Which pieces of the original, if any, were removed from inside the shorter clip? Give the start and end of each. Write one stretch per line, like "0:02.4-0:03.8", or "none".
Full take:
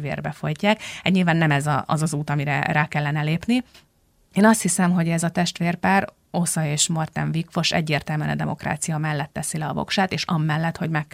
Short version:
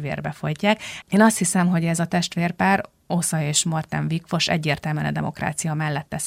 0:01.0-0:04.3